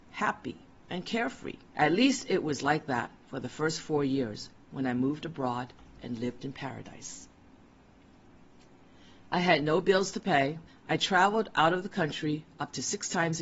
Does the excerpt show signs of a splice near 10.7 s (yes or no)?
yes